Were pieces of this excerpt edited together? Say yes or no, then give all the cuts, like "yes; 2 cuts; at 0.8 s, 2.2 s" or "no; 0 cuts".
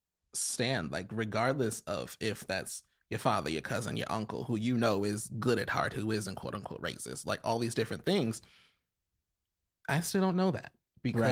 no; 0 cuts